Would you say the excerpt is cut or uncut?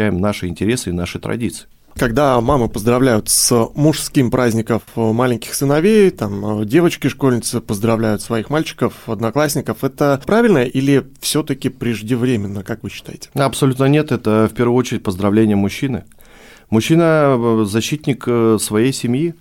uncut